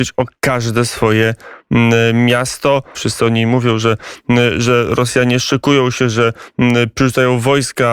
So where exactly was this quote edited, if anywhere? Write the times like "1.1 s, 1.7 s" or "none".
2.9 s